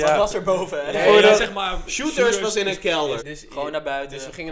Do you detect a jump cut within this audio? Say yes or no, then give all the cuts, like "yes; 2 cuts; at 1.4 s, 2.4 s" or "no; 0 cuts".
yes; 2 cuts; at 0.9 s, 3.2 s